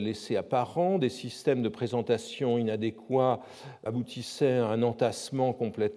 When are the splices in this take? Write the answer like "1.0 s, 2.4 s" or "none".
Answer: 3.9 s